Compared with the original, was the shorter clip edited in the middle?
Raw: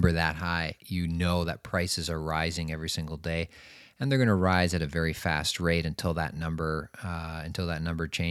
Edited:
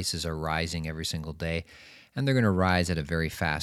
no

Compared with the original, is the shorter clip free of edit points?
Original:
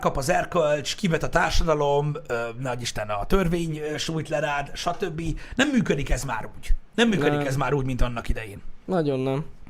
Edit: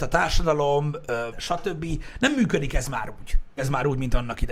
no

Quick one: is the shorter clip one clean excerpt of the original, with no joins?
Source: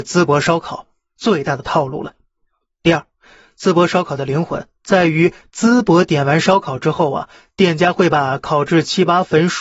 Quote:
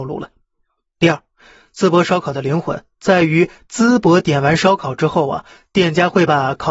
yes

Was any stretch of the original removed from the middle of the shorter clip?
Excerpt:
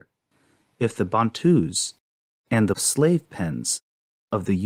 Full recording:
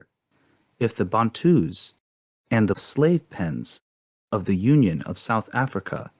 no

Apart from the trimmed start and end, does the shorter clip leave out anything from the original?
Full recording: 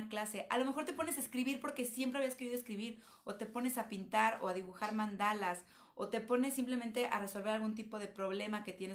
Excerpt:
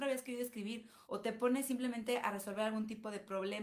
yes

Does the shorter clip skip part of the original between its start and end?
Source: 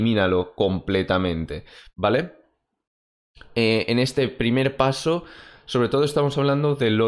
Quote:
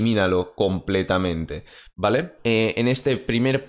yes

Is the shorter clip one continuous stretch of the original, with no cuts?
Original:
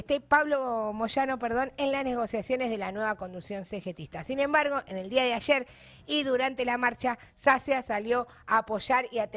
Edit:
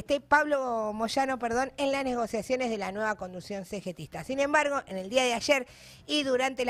yes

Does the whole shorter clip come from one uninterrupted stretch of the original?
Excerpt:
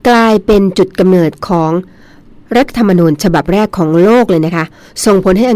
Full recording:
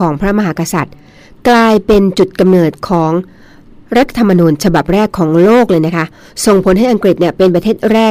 yes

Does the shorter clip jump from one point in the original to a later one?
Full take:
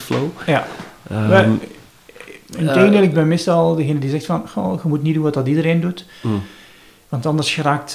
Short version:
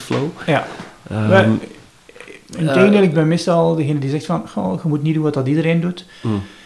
no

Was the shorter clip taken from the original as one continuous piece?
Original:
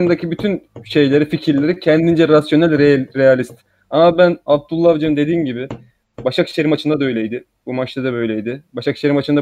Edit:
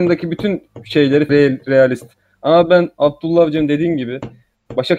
no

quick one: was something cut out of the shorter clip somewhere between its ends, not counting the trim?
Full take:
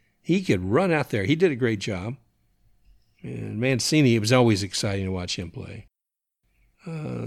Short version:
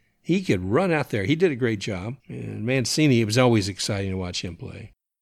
yes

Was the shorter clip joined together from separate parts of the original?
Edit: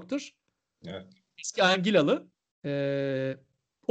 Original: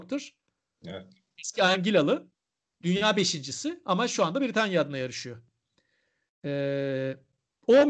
yes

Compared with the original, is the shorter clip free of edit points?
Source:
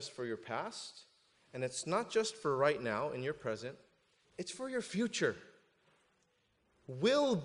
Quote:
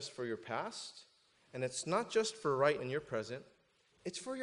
no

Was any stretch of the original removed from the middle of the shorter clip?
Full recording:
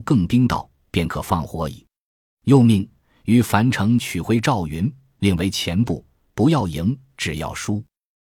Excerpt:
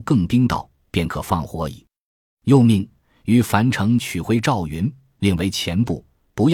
no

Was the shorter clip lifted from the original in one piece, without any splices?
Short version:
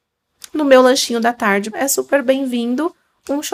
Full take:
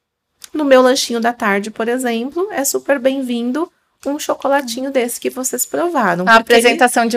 no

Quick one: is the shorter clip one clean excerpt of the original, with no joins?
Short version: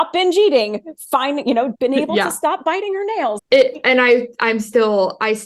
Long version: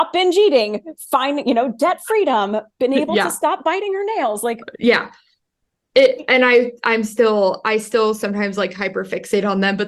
no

